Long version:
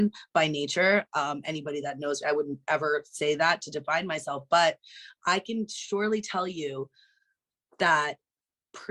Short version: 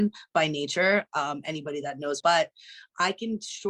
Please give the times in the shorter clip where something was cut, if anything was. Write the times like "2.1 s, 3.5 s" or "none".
2.2 s